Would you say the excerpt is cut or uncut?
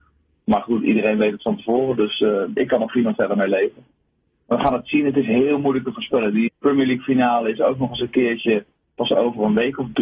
cut